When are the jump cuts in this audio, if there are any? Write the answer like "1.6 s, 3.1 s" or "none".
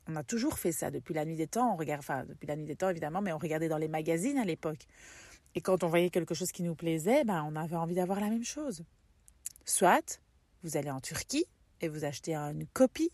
9.5 s